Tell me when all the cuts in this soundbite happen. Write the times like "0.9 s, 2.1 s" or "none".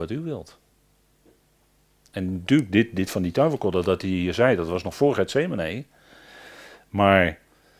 none